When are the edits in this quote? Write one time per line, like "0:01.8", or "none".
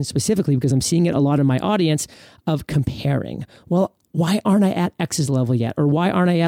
none